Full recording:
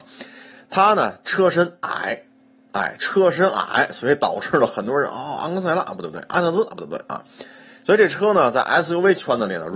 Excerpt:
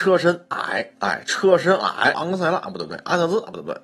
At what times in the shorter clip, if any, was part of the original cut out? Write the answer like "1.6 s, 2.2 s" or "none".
0.9 s, 2.1 s